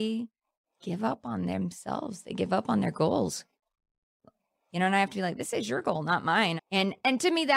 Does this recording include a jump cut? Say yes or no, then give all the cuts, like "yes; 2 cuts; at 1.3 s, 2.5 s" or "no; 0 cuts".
yes; 1 cut; at 6.6 s